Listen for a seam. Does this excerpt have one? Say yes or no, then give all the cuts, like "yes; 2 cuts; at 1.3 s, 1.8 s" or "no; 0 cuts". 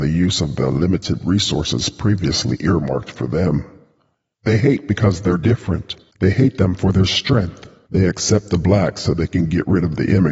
yes; 2 cuts; at 4.3 s, 7.9 s